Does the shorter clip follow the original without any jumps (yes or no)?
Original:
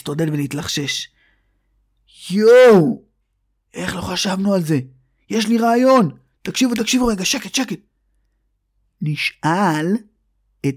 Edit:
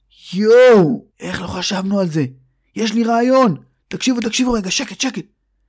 no